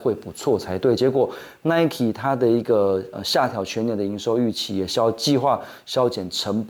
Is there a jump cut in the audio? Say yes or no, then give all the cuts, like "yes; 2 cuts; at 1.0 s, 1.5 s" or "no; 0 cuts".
no; 0 cuts